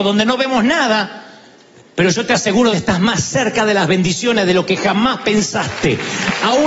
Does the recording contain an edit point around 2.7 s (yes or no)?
yes